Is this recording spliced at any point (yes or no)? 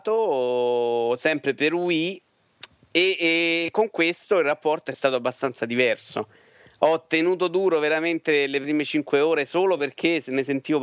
no